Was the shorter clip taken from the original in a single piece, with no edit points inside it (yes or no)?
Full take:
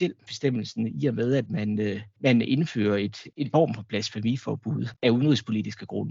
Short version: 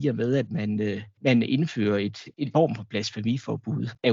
yes